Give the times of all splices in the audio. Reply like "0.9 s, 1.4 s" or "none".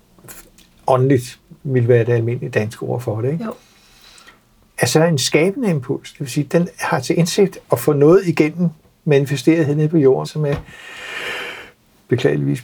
10.2 s